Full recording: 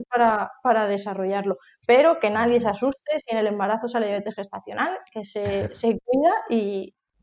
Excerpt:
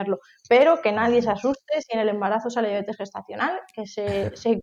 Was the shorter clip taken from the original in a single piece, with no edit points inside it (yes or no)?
yes